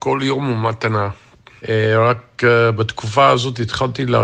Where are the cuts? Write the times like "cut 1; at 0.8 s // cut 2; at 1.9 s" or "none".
cut 1; at 1.6 s